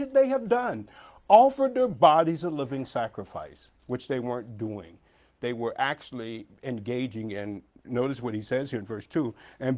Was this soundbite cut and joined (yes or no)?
no